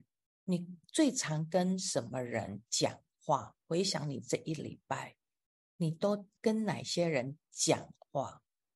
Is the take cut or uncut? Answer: cut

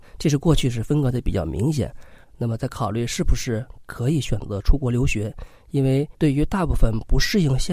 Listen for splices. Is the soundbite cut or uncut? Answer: cut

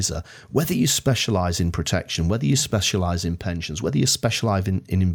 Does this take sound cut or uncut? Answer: uncut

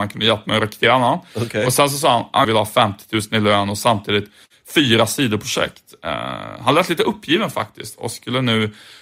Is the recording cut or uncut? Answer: cut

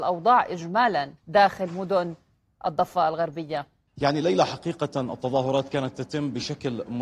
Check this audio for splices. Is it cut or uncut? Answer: cut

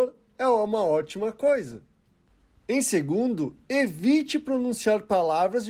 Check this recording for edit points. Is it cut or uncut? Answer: uncut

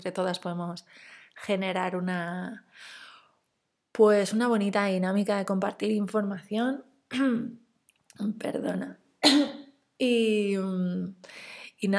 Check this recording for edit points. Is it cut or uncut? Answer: uncut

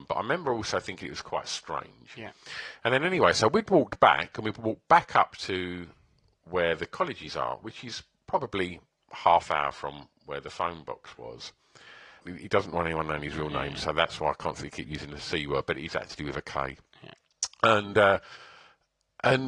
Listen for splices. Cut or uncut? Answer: cut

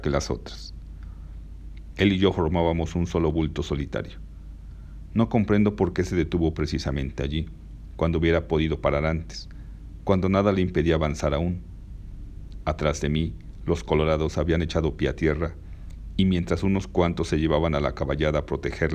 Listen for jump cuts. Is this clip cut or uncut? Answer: cut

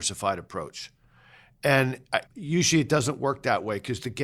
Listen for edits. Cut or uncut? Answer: cut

